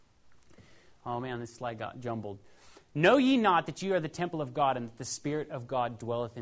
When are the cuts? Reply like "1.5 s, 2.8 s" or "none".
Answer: none